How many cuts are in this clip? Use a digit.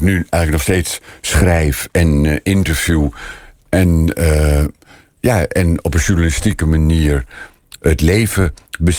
0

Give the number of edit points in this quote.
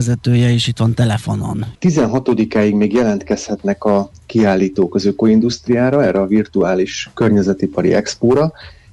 1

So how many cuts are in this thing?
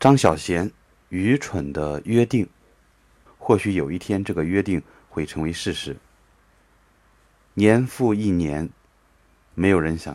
1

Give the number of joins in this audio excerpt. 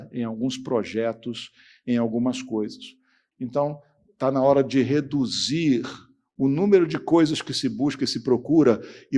1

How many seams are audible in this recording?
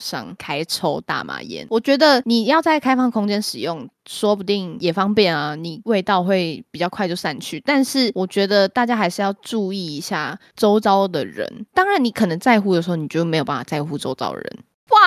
0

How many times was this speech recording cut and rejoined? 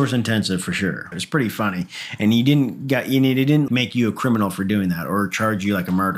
2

